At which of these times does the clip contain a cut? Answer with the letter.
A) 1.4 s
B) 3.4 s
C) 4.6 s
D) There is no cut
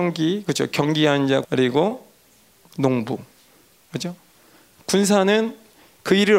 A